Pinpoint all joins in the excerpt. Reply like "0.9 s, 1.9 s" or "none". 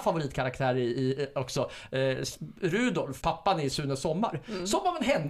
3.2 s